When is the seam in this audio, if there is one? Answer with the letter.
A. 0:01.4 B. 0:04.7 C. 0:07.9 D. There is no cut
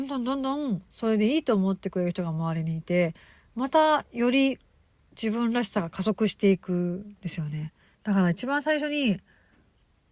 C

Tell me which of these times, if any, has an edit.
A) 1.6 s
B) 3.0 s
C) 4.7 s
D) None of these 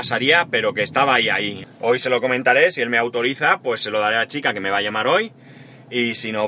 A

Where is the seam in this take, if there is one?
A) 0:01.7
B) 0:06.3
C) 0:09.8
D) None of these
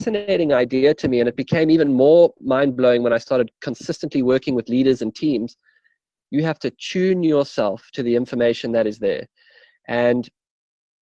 B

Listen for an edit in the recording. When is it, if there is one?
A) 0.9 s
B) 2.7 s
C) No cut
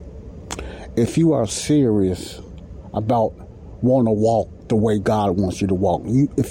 C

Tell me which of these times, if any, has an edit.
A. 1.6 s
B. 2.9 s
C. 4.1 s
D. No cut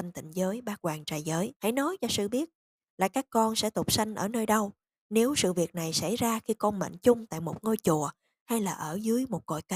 A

